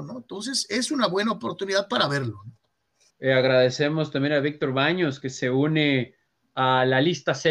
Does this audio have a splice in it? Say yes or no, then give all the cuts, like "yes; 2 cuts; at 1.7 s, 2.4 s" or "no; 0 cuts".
yes; 1 cut; at 3.1 s